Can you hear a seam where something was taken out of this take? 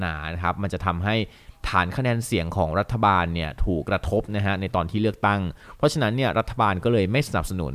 yes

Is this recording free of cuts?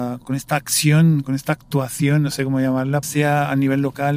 no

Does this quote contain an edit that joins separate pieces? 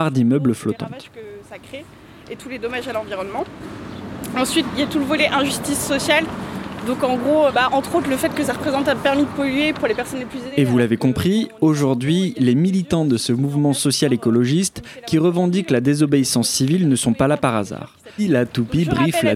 yes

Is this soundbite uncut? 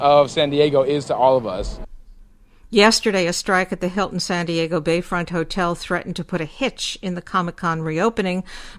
yes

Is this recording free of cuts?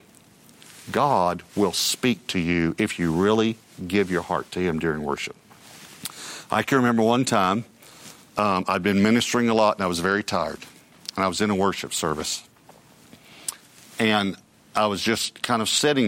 yes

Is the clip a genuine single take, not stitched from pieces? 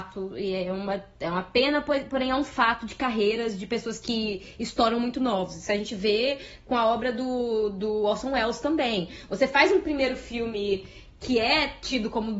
yes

